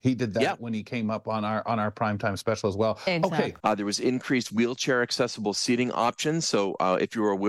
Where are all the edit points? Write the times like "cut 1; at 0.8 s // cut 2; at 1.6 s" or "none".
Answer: cut 1; at 3.6 s